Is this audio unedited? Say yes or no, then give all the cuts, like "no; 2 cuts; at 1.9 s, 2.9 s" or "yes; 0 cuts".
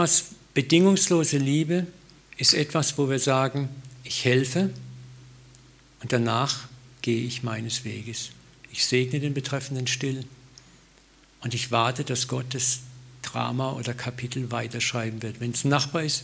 yes; 0 cuts